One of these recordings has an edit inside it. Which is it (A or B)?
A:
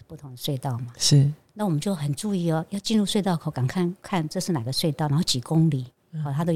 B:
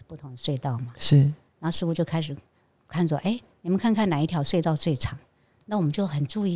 A